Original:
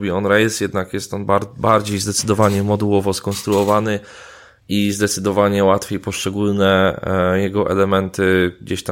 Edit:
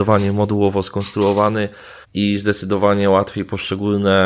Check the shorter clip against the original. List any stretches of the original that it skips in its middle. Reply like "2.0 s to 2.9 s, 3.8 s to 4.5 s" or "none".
4.3 s to 4.6 s